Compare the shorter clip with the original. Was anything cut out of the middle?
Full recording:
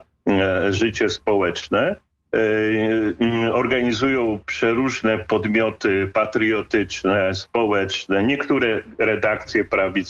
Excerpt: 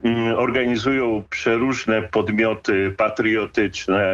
no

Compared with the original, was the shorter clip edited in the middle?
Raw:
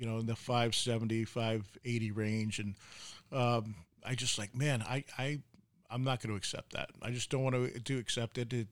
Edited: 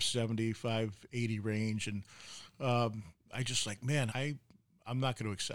yes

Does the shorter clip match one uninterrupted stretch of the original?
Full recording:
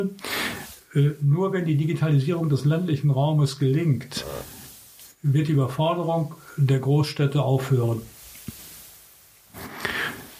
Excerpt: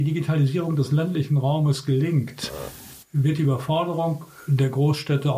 no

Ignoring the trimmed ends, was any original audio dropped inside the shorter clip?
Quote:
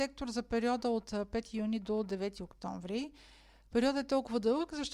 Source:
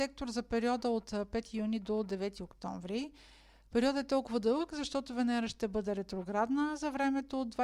no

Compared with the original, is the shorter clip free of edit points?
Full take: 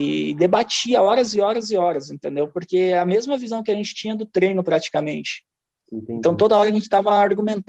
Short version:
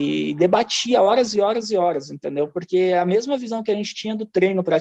yes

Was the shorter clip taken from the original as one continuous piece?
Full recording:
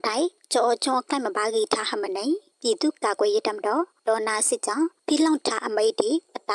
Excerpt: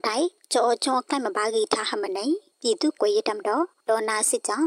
no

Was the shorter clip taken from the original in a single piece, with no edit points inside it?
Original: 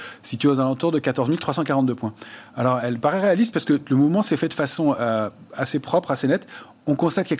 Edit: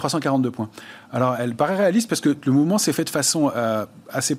yes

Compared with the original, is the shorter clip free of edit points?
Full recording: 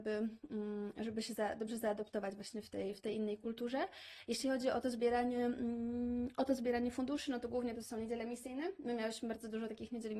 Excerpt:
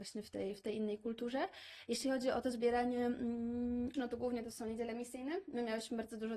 no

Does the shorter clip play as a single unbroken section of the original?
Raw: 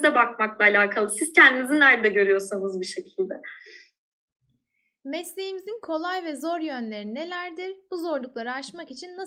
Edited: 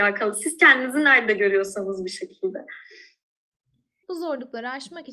no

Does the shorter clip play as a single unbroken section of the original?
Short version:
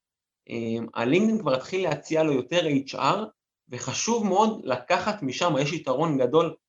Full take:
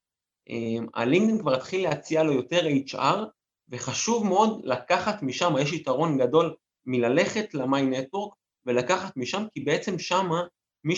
yes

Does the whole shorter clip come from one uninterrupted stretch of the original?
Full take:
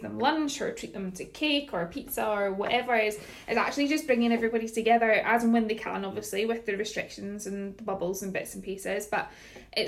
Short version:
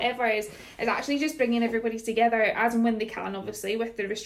yes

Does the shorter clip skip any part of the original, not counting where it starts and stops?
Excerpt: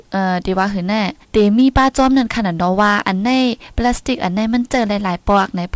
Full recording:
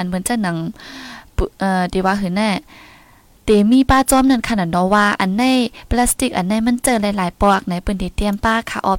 yes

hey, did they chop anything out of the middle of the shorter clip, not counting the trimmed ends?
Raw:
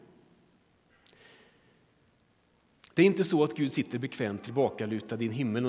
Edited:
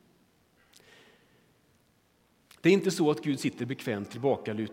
no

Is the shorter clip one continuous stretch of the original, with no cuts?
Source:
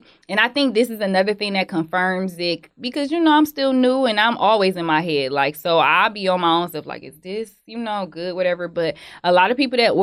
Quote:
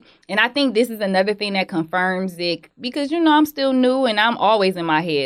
yes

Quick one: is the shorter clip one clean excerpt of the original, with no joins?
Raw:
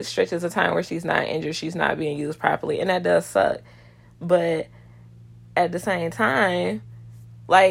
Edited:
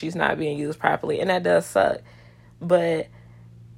yes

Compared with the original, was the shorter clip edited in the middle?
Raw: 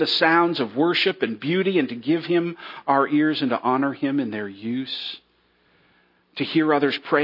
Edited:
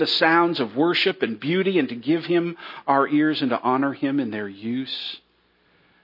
no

